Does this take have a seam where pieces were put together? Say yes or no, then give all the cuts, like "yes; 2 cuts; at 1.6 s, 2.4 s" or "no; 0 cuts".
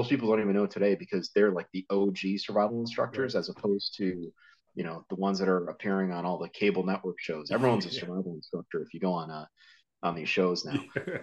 no; 0 cuts